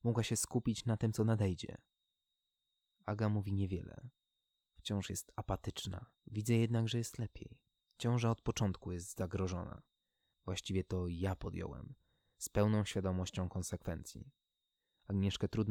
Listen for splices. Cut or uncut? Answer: cut